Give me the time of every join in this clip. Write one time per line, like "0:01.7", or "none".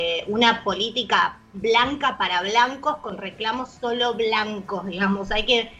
none